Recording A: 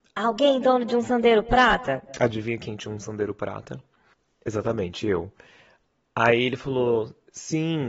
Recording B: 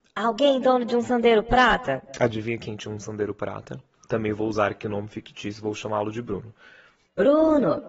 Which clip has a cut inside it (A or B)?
B